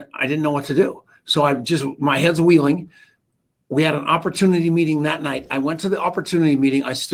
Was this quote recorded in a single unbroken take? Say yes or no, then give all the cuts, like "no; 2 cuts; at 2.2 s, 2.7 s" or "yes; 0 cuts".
yes; 0 cuts